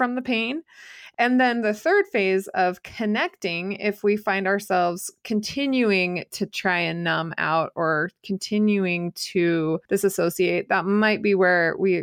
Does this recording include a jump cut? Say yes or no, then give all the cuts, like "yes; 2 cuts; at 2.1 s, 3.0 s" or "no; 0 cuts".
yes; 1 cut; at 9.9 s